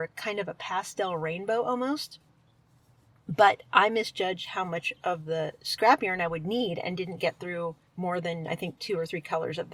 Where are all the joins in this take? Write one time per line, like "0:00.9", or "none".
0:07.9